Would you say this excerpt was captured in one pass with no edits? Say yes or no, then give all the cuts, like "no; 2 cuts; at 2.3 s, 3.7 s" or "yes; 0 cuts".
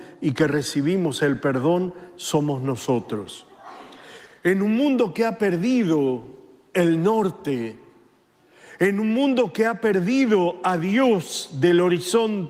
no; 1 cut; at 4.3 s